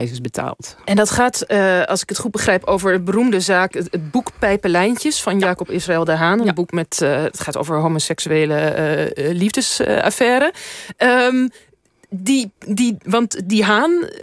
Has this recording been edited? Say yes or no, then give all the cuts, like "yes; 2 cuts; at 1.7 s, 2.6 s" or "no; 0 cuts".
no; 0 cuts